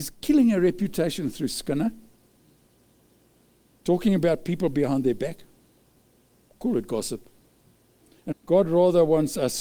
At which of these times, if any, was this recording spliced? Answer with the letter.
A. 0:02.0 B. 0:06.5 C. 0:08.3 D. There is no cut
C